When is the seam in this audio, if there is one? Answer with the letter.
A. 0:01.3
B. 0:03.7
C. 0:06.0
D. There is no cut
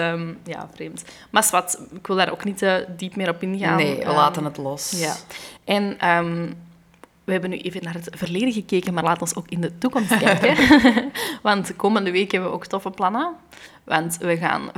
D